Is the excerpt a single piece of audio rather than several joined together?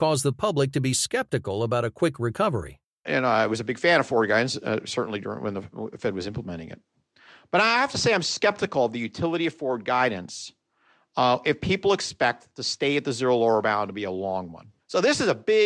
yes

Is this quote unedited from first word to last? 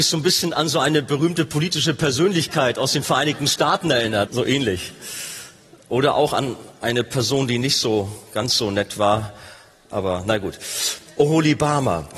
no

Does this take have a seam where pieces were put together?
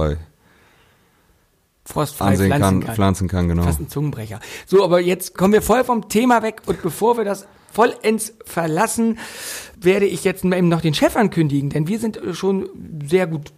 no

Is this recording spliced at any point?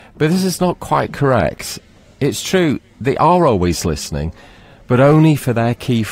no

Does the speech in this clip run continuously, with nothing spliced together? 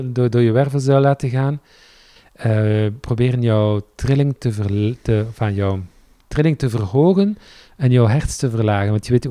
no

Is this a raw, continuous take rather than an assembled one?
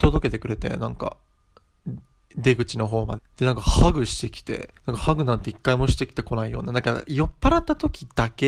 no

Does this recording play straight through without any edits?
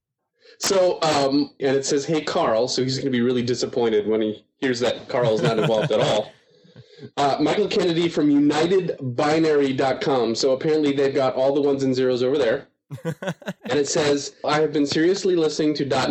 no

